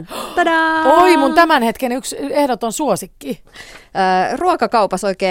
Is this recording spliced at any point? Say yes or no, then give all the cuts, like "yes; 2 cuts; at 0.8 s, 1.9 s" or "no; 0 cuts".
no; 0 cuts